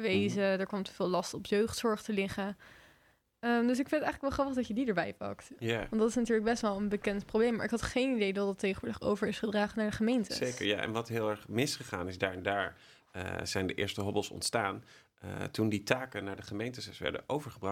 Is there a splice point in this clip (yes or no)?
no